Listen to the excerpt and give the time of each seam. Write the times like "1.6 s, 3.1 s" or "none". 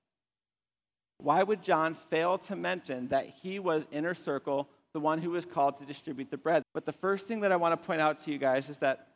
6.6 s